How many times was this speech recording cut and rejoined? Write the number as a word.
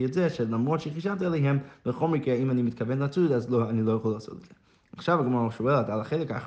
zero